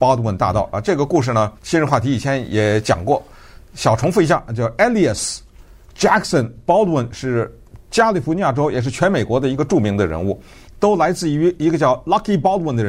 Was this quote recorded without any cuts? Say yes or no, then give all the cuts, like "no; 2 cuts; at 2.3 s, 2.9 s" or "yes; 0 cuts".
no; 2 cuts; at 1.6 s, 10.7 s